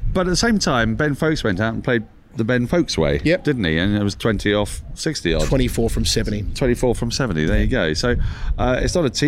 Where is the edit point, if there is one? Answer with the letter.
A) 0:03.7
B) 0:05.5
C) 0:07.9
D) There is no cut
D